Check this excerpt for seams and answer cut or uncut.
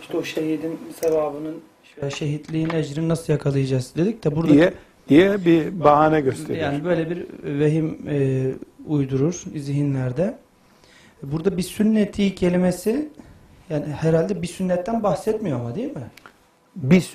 uncut